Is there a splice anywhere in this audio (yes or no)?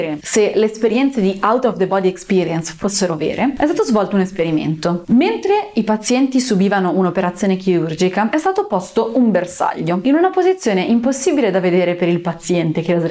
no